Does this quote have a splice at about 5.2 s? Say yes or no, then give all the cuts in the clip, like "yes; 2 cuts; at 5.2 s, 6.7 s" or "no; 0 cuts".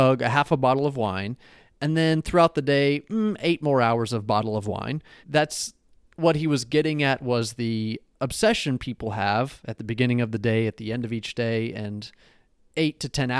yes; 1 cut; at 5.2 s